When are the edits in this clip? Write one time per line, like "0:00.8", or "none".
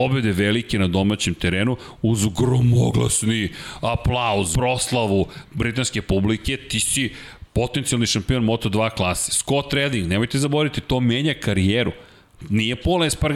0:04.5